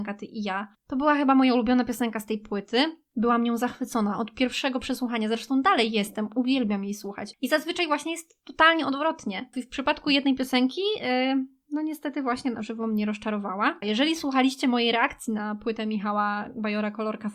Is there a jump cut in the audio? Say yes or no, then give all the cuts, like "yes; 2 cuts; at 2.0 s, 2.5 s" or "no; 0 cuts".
yes; 3 cuts; at 7.3 s, 9.5 s, 13.8 s